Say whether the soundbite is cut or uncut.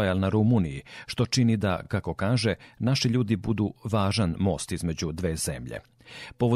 uncut